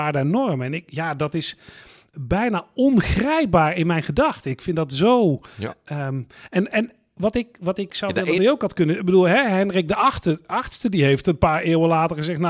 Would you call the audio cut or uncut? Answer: cut